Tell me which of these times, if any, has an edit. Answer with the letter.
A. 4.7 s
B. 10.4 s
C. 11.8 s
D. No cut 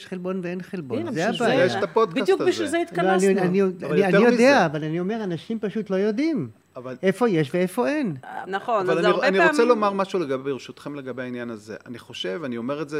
D